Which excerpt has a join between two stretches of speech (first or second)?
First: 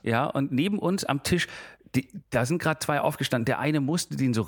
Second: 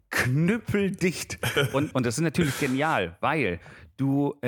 second